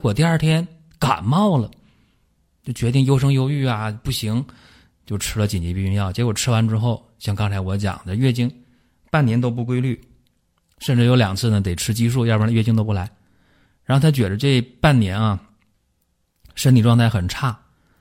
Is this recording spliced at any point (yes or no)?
no